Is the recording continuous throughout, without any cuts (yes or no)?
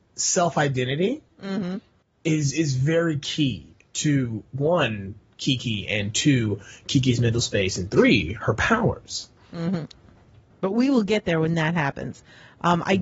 yes